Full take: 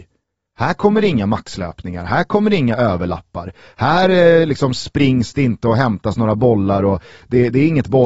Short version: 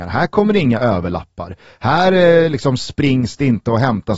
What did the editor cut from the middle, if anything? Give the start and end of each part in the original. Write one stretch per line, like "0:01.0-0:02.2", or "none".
none